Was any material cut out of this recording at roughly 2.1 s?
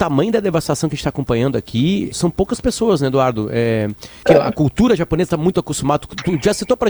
yes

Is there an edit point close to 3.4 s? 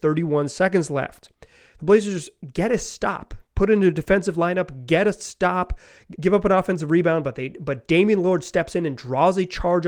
yes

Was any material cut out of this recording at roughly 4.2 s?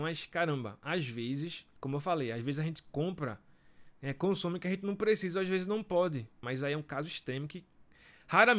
no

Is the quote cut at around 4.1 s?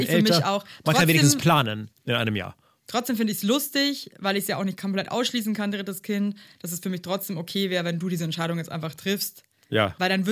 no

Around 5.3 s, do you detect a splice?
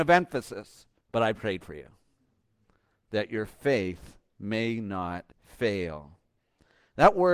yes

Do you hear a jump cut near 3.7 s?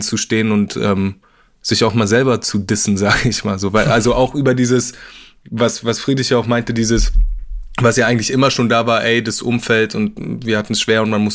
no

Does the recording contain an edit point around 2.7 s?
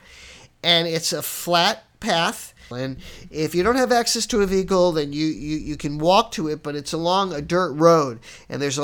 yes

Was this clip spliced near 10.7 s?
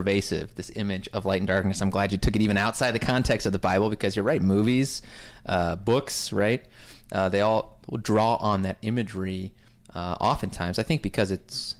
no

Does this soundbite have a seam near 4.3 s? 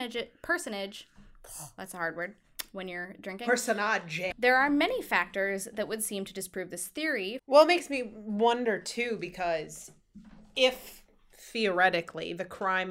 yes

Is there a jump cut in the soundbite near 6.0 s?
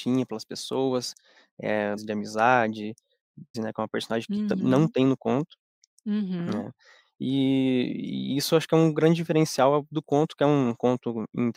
no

